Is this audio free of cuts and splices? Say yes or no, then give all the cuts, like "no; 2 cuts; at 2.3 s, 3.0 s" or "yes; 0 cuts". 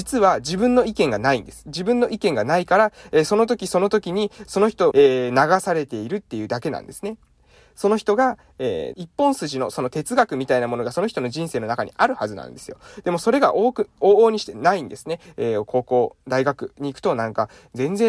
no; 3 cuts; at 4.9 s, 8.9 s, 15.3 s